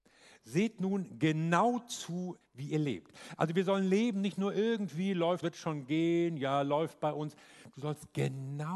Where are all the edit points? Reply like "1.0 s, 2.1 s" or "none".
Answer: 2.4 s, 5.4 s